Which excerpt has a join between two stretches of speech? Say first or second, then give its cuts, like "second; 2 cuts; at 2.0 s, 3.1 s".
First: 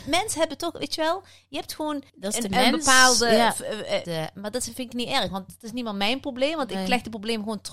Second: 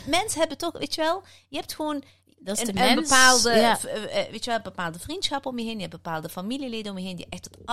first; 2 cuts; at 2.1 s, 4.0 s